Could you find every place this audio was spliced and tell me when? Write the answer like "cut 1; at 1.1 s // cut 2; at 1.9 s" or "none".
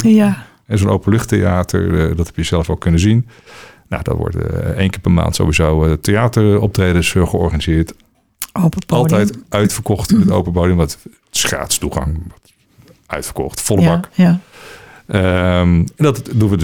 none